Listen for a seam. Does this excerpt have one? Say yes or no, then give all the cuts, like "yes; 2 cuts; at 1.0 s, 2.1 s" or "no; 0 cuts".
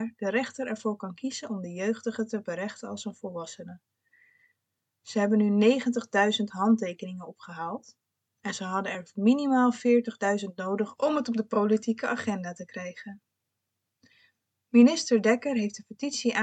no; 0 cuts